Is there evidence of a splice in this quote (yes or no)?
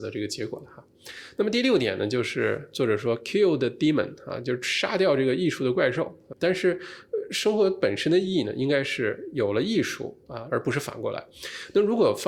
yes